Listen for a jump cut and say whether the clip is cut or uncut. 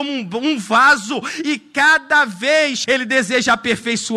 cut